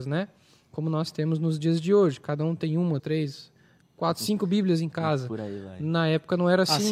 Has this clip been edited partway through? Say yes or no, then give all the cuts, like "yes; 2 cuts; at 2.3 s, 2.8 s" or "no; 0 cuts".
yes; 1 cut; at 3.0 s